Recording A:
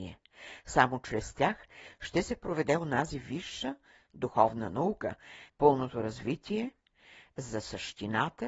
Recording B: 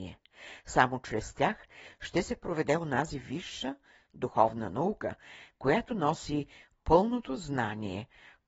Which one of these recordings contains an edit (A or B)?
A